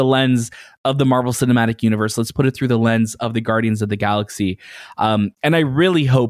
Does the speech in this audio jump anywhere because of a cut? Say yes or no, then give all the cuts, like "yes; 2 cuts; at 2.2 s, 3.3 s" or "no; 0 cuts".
no; 0 cuts